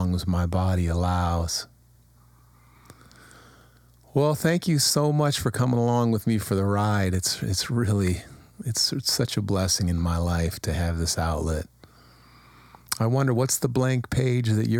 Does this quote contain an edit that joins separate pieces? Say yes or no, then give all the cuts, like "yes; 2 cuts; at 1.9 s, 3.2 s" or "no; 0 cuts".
no; 0 cuts